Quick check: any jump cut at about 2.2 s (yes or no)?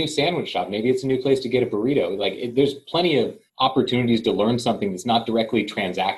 no